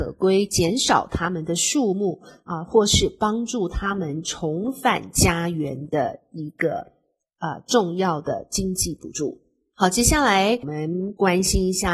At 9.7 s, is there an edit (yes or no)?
no